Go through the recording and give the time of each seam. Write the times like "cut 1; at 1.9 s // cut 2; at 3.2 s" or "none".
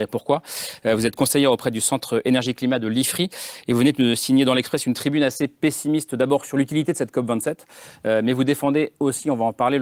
none